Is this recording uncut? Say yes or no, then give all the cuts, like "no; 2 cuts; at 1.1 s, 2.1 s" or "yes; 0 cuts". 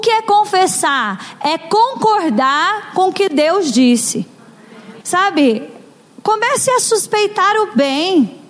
no; 1 cut; at 5.0 s